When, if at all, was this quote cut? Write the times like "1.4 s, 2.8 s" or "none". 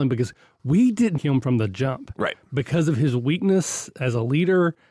1.2 s

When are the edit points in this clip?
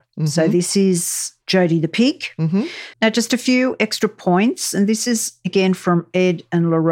2.9 s

